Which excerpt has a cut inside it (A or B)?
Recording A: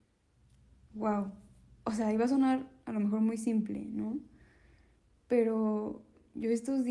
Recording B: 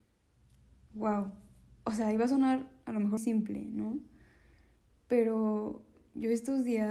B